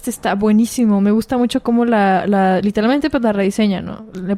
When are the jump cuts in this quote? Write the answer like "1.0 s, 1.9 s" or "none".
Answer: none

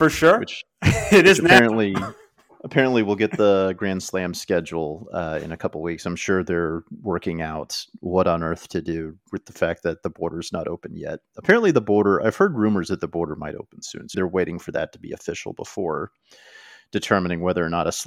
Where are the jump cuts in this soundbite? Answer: 14.1 s

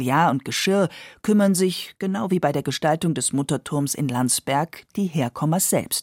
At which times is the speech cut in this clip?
none

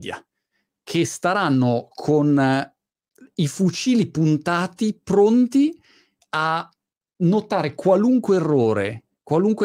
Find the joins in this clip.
none

